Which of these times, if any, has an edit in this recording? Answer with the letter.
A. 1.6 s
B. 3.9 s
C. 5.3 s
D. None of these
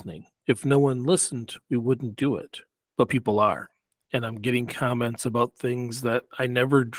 D